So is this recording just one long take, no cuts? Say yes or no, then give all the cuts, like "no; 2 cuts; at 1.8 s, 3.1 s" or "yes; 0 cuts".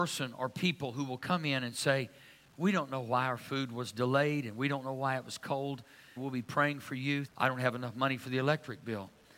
no; 2 cuts; at 6.2 s, 7.3 s